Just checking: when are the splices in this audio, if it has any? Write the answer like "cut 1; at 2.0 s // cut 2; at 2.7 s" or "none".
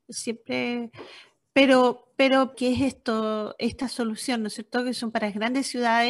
cut 1; at 2.5 s